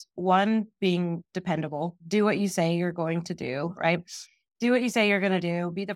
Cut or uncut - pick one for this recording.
cut